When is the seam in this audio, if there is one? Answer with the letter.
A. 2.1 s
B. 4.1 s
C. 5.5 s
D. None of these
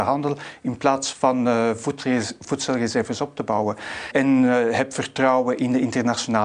B